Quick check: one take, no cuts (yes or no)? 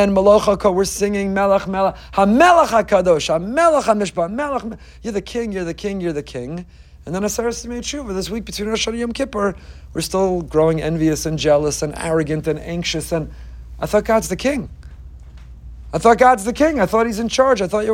yes